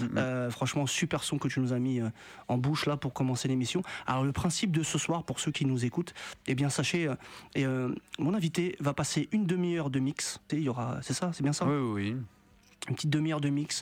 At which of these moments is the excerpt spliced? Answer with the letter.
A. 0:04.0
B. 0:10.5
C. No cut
B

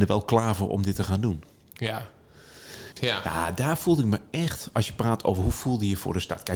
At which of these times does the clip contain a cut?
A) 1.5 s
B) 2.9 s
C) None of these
B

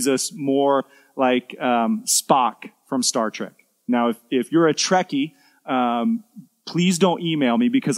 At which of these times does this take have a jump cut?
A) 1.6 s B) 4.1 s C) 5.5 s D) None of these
D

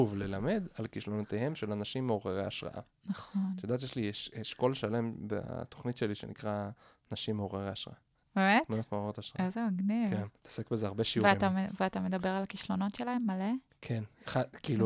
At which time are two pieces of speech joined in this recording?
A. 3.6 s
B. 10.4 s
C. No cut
B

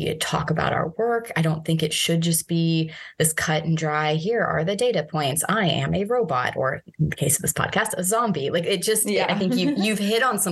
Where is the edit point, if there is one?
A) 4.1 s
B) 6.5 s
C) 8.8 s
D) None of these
D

